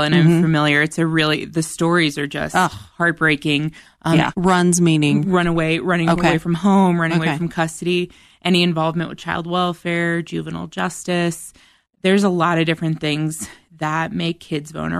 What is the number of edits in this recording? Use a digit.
1